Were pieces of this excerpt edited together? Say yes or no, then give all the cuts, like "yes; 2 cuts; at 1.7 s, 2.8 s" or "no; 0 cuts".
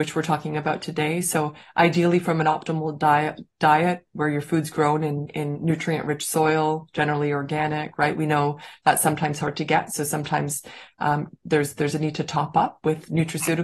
no; 0 cuts